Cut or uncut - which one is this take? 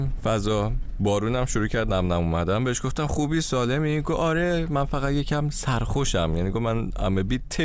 uncut